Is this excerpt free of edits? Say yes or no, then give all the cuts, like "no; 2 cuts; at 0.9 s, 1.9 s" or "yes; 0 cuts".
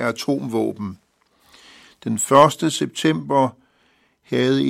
yes; 0 cuts